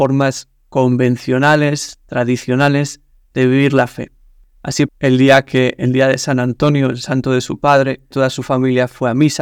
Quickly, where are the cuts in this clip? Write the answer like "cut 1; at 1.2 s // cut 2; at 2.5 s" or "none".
cut 1; at 4.9 s // cut 2; at 8.1 s